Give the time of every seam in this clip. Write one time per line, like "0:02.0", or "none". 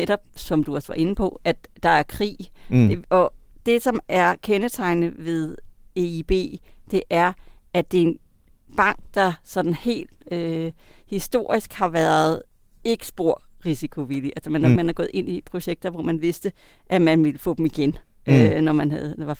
0:14.8